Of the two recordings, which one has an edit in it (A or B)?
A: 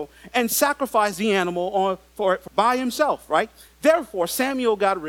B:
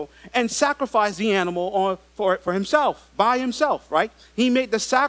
A